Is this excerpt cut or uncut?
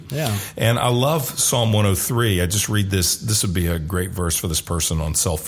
uncut